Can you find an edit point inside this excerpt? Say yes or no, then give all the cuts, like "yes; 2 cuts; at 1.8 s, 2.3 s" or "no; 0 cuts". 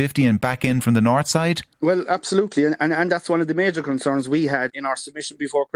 yes; 2 cuts; at 1.7 s, 4.7 s